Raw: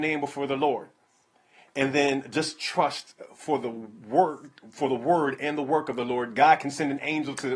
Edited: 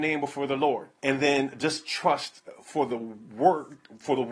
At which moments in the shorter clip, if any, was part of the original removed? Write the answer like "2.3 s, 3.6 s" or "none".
1.0 s